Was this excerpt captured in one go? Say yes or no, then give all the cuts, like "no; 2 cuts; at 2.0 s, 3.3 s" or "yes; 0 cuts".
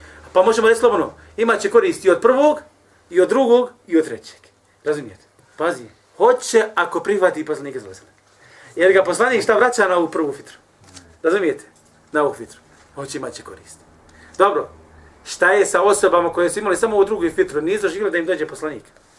no; 1 cut; at 5.4 s